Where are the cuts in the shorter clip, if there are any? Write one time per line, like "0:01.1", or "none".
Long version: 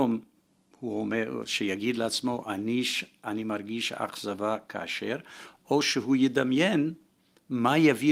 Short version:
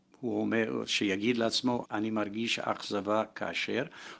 0:01.8

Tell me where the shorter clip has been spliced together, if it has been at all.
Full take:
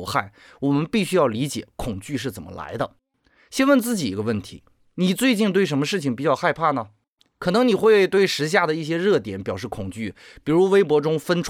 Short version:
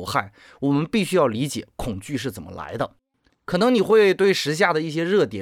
0:03.3

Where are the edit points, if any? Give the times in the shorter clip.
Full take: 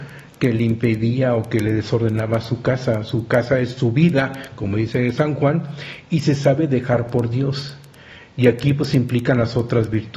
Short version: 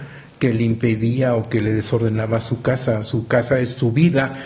none

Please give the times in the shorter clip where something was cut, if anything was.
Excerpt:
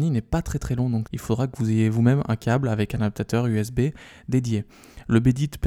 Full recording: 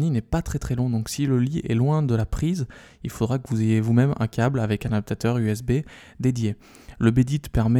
0:01.0

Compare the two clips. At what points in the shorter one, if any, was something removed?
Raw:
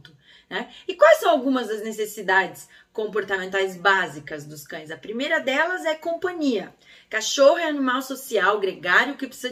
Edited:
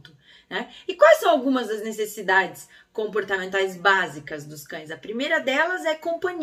none

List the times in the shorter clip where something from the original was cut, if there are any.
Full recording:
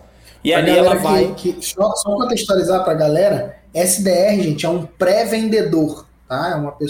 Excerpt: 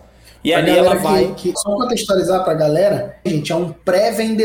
0:01.5
0:03.3

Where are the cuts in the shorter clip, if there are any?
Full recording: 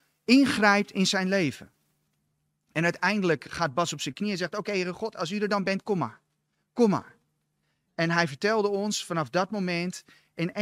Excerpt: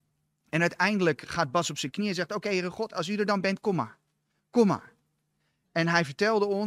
none

